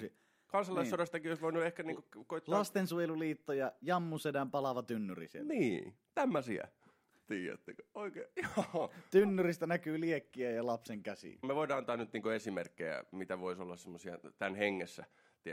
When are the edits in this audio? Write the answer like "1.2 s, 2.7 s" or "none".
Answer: 11.4 s